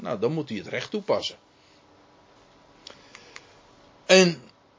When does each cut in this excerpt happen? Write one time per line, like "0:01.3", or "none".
none